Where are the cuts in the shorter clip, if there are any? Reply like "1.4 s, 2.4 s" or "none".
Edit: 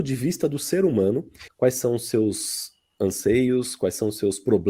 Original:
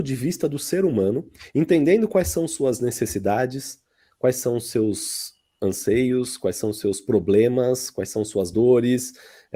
1.5 s